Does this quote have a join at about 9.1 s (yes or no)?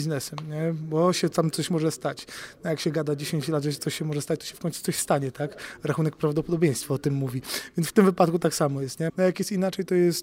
yes